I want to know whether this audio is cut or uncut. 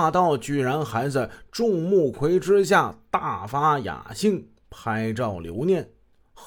cut